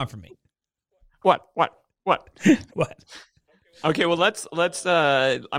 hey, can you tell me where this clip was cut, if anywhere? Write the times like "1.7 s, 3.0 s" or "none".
2.7 s